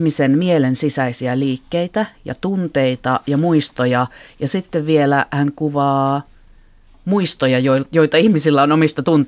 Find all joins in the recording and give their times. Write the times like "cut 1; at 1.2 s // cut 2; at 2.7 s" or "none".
none